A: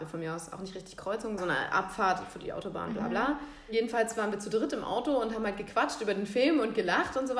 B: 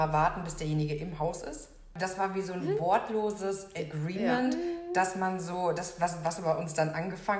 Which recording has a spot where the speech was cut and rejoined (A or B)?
A